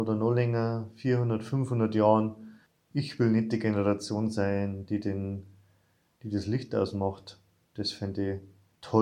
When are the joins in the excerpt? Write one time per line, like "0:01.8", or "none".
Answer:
none